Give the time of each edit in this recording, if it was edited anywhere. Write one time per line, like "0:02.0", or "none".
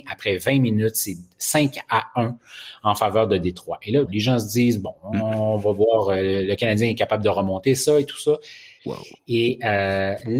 0:04.1
0:08.8